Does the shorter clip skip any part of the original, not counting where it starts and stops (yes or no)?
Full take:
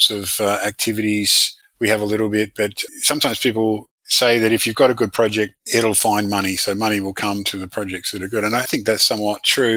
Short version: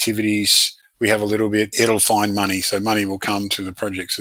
yes